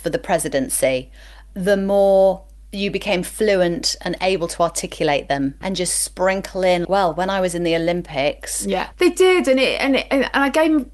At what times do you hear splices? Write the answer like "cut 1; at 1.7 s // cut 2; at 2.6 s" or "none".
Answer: cut 1; at 5.6 s // cut 2; at 6.8 s // cut 3; at 8.9 s